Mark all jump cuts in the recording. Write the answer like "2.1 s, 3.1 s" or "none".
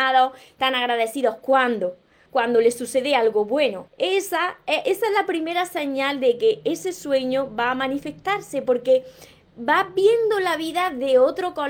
2.3 s, 3.9 s